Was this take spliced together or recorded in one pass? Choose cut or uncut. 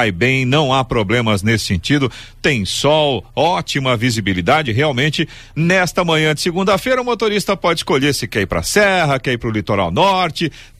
uncut